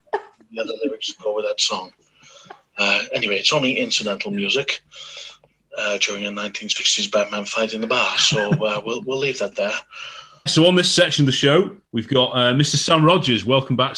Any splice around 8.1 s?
no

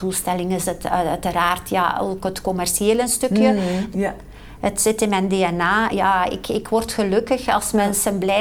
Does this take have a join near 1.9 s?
no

